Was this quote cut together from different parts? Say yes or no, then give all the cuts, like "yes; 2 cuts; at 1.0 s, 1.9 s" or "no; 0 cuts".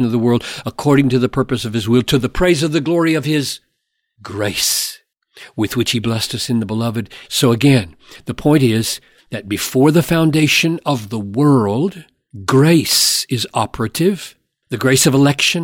yes; 1 cut; at 7.2 s